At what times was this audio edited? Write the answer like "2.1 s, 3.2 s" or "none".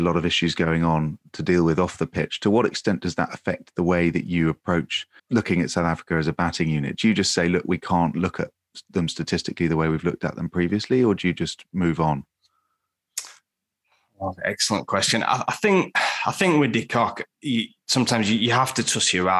5.2 s